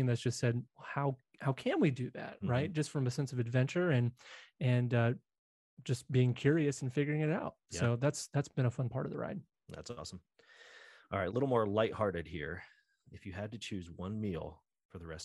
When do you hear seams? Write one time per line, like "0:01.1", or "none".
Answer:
0:11.3